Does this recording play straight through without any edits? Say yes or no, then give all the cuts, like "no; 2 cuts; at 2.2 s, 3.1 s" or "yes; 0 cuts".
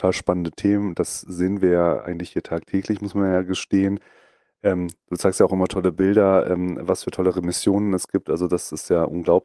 yes; 0 cuts